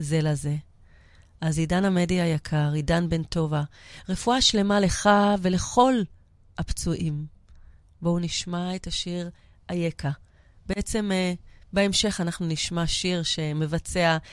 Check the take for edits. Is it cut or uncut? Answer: uncut